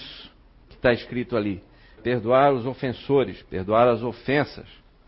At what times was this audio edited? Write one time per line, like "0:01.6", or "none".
0:02.0